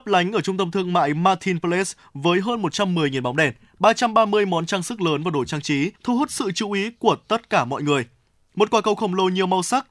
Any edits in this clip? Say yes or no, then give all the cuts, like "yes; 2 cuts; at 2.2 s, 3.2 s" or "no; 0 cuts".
yes; 1 cut; at 6.0 s